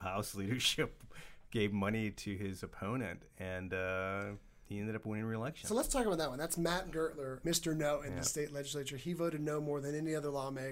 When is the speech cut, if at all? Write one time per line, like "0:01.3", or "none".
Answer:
0:07.4